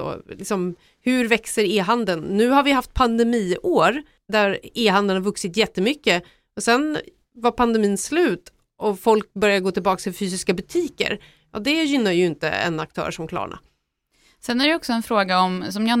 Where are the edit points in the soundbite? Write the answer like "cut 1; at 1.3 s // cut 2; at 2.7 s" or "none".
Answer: none